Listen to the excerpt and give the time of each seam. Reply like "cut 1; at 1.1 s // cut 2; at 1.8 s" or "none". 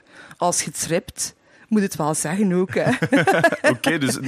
none